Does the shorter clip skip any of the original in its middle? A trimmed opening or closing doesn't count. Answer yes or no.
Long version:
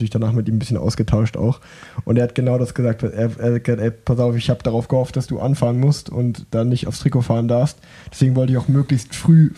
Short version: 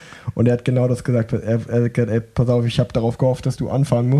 no